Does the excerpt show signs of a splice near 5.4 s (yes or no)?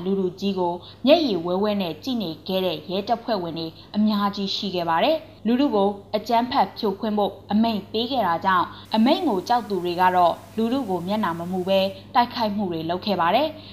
yes